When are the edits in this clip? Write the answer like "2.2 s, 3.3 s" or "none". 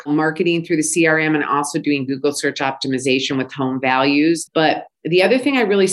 4.5 s